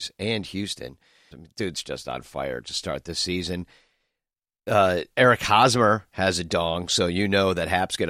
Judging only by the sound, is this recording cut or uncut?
cut